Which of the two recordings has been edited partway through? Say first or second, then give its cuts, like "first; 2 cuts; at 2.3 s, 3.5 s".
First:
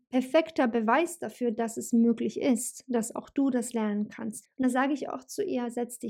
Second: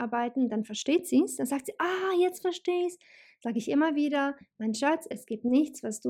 first; 1 cut; at 4.4 s